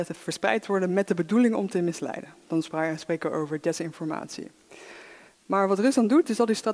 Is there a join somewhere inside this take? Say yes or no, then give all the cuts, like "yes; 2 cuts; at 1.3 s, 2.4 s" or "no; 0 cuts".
no; 0 cuts